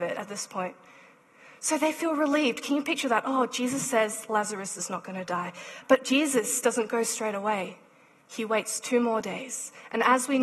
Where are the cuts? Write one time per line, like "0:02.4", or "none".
none